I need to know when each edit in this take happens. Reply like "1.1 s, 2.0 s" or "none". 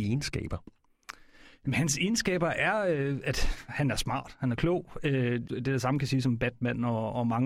5.4 s